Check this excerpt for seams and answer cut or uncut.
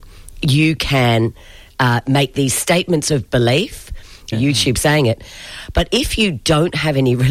cut